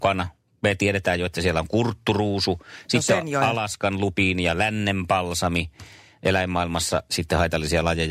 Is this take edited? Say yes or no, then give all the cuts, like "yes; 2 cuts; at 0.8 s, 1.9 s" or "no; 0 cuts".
no; 0 cuts